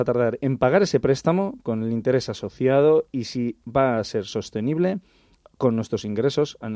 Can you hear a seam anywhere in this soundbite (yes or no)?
no